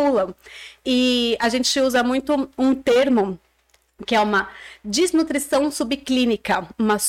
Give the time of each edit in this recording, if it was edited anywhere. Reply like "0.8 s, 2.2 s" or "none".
none